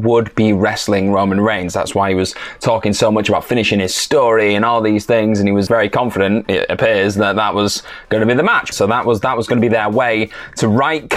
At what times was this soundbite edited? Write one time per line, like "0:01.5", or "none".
0:05.7
0:08.7